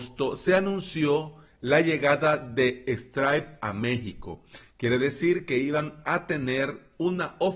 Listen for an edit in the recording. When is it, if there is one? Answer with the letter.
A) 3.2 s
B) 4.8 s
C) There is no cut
C